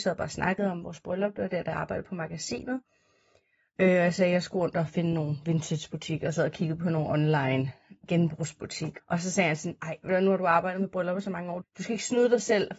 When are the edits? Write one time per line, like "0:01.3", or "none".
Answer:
0:09.0
0:11.6